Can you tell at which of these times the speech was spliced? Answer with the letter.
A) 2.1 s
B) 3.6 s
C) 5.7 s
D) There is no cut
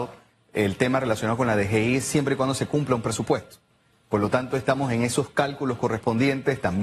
D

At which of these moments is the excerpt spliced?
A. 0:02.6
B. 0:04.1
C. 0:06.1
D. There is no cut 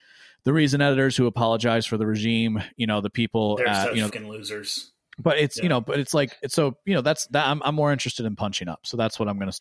B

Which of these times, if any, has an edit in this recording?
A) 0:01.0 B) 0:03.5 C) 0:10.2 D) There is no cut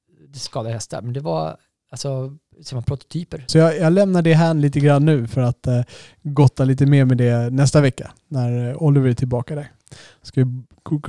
B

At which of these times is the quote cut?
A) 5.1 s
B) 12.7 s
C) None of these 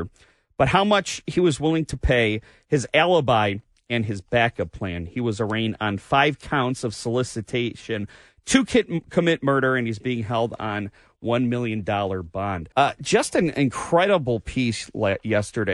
B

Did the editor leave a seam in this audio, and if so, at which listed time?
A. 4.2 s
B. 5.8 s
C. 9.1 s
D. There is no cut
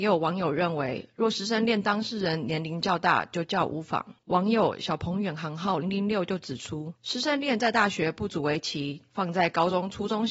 B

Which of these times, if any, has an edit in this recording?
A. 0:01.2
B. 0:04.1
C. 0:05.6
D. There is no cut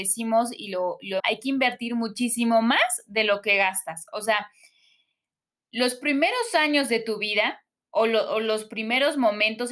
A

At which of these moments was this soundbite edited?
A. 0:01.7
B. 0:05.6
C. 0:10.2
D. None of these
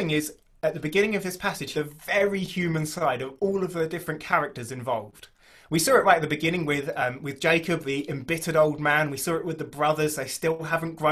A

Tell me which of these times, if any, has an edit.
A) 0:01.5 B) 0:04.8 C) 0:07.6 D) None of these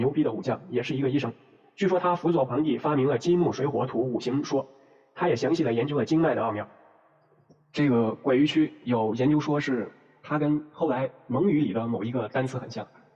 D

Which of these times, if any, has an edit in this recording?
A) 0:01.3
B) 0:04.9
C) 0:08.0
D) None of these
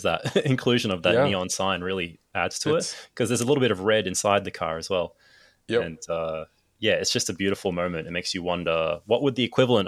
D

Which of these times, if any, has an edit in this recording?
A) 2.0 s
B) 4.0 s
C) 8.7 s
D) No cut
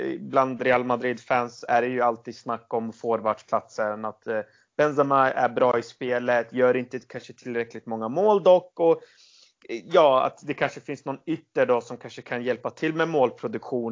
D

